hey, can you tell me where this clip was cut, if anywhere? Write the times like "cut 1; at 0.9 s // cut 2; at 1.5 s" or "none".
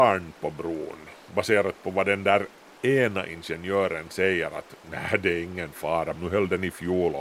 cut 1; at 6.1 s